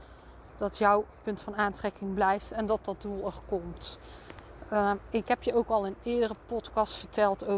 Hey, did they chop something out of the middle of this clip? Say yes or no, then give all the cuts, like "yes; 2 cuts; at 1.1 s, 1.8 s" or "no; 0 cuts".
no; 0 cuts